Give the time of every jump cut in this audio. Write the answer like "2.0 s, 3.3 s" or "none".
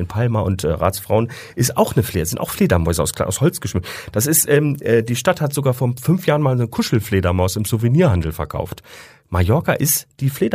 none